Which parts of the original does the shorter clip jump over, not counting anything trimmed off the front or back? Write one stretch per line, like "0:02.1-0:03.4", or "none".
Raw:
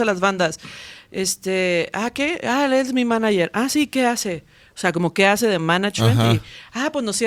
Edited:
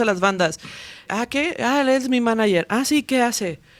0:01.1-0:01.9